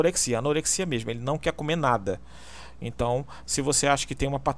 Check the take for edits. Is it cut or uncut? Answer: cut